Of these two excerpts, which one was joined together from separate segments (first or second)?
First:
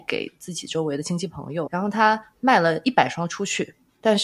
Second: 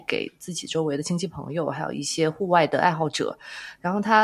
first